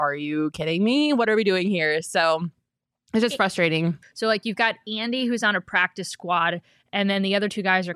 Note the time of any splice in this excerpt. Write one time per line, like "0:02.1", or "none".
0:04.0